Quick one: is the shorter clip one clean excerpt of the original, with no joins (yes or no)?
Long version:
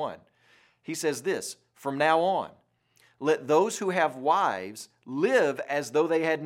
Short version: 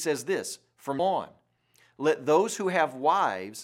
no